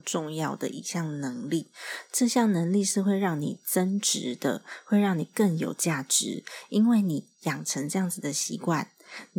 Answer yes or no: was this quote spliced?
no